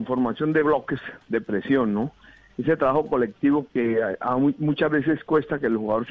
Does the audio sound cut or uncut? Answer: uncut